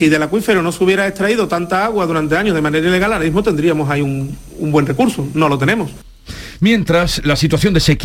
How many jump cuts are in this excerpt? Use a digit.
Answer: 0